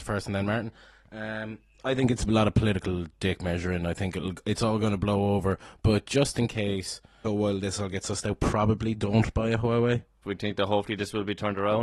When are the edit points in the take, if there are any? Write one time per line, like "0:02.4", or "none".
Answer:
0:07.2
0:10.2

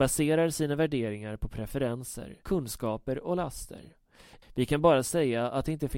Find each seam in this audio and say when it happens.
0:02.4
0:04.4

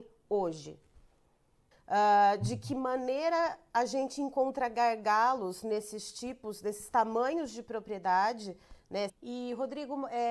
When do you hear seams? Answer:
0:01.7
0:09.1

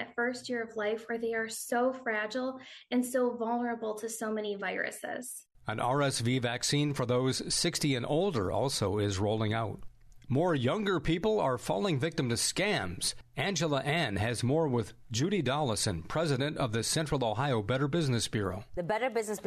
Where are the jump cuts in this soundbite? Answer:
none

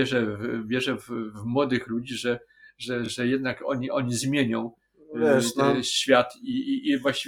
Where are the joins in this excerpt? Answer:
none

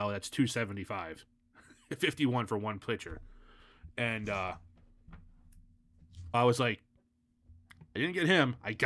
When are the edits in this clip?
0:06.3

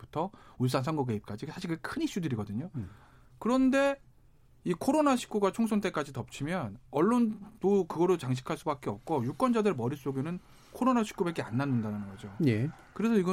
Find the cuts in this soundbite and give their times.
none

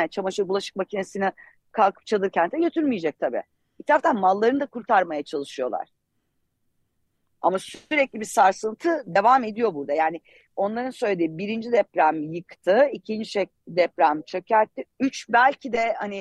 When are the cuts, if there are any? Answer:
0:14.9

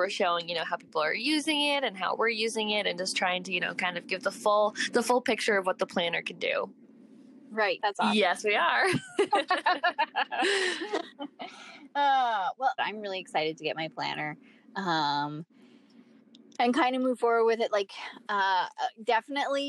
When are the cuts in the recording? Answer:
0:07.8
0:12.8

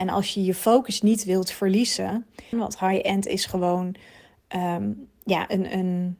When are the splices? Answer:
0:02.5

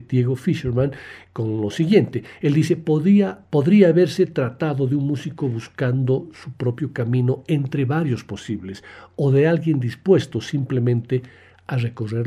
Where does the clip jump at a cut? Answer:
none

